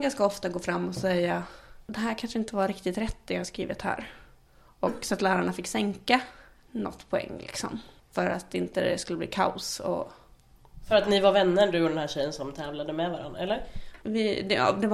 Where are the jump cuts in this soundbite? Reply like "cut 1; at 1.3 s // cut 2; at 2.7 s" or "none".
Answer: cut 1; at 6.6 s // cut 2; at 14.0 s